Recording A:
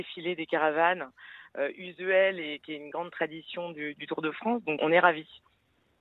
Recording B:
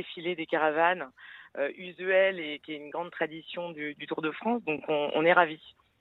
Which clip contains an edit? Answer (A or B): A